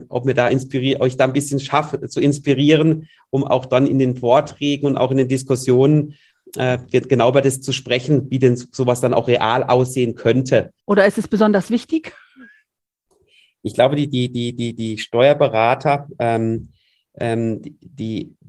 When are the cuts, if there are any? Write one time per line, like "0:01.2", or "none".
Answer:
0:10.8